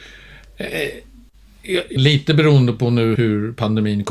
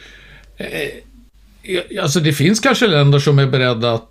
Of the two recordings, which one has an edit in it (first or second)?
first